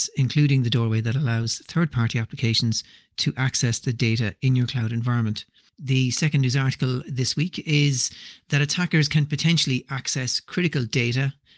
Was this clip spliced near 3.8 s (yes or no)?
no